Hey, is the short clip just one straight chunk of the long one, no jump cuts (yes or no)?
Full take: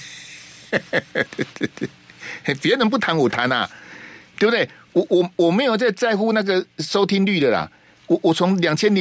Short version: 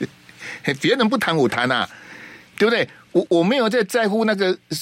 no